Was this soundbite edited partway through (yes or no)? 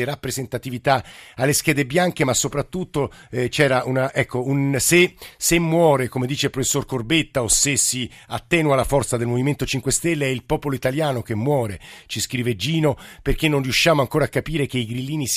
no